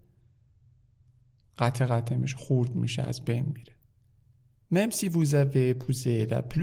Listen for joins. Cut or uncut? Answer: uncut